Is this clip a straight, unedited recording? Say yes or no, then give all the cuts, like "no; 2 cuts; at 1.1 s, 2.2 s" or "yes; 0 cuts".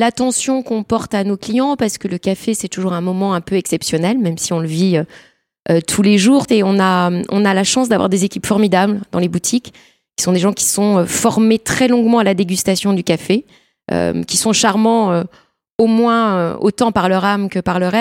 no; 1 cut; at 6.5 s